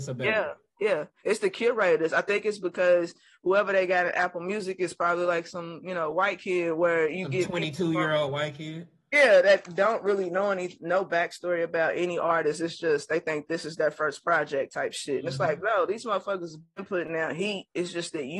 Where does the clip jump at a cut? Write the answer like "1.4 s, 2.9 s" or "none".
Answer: none